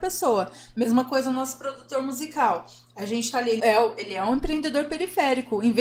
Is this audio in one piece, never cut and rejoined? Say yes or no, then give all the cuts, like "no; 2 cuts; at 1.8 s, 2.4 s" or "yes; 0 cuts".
no; 1 cut; at 3.6 s